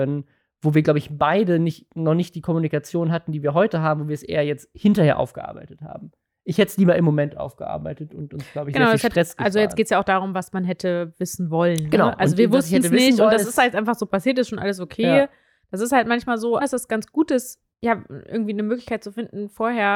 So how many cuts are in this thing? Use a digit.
2